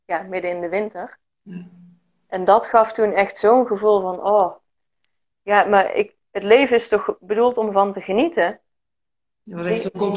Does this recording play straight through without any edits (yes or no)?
yes